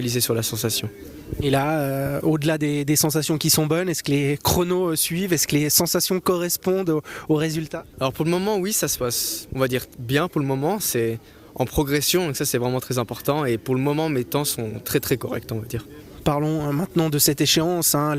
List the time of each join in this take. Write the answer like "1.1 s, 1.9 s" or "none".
none